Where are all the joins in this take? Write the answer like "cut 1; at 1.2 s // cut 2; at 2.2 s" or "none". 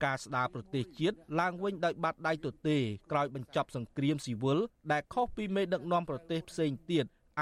none